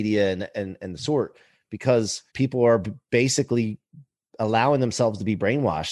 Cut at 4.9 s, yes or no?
no